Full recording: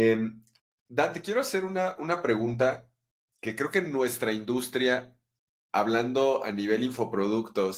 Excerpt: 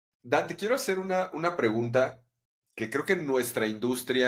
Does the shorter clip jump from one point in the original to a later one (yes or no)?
no